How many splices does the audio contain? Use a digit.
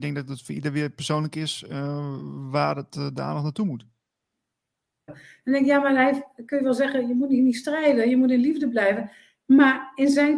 1